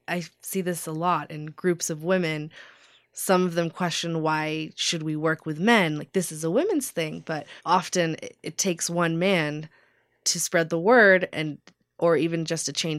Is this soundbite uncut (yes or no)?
no